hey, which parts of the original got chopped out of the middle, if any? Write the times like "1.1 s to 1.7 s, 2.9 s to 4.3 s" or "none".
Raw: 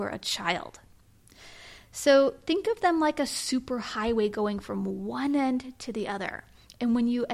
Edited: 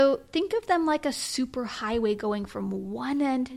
none